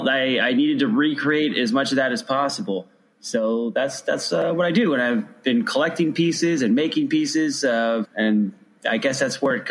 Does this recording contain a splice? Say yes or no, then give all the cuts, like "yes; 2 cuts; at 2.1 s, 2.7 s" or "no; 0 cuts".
yes; 1 cut; at 8.0 s